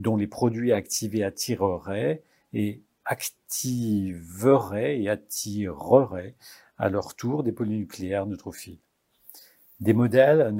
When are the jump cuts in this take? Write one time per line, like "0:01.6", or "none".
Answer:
none